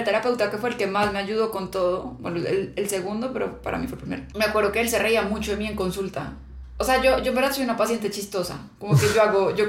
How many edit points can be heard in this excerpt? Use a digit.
0